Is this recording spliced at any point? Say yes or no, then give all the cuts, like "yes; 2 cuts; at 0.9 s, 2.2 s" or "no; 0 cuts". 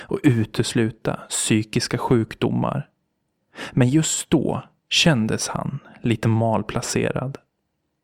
no; 0 cuts